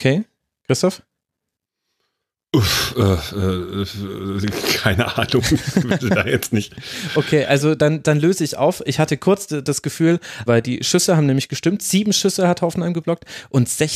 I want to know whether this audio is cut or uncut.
cut